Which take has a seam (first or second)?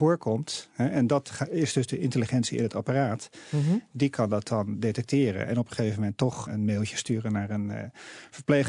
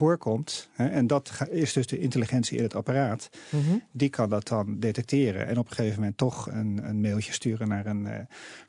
first